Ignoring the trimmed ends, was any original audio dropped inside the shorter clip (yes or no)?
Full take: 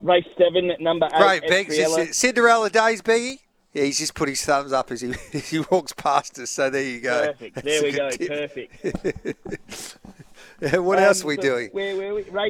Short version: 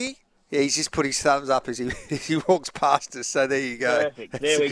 no